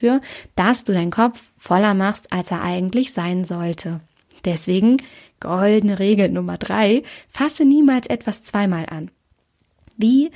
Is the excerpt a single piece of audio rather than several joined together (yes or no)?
yes